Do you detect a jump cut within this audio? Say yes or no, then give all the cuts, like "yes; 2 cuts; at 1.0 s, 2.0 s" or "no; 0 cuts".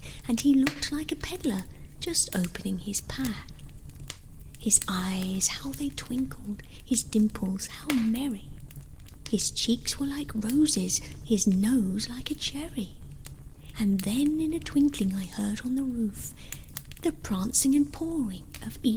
yes; 1 cut; at 13.7 s